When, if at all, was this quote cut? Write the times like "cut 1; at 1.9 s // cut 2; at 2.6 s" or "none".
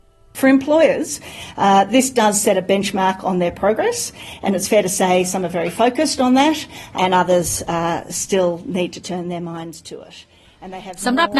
cut 1; at 7.0 s